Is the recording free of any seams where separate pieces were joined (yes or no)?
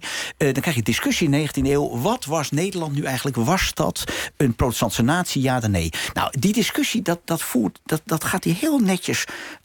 yes